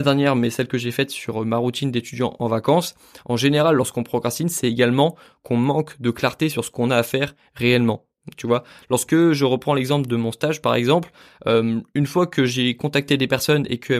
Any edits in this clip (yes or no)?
no